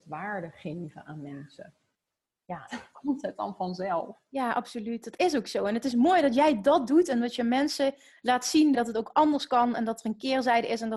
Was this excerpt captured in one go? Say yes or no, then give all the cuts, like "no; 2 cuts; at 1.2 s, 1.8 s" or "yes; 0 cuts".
no; 2 cuts; at 2.7 s, 8.7 s